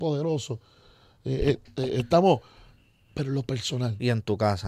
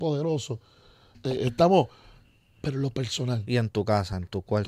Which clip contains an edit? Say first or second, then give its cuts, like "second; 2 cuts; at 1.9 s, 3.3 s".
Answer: second; 1 cut; at 1.1 s